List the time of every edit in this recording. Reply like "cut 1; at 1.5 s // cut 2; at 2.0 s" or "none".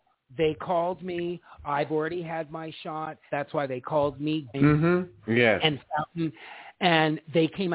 cut 1; at 3.3 s // cut 2; at 4.5 s

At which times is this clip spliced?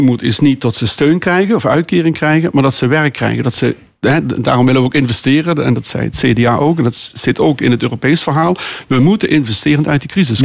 none

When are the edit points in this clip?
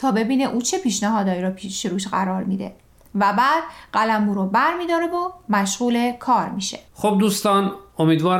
cut 1; at 6.9 s

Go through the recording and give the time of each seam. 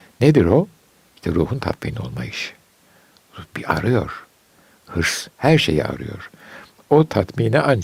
none

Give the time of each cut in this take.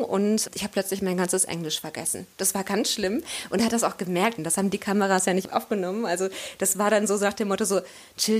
cut 1; at 4.4 s

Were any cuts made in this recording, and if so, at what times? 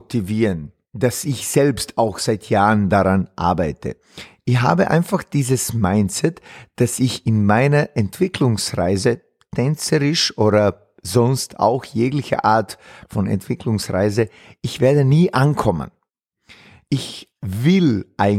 none

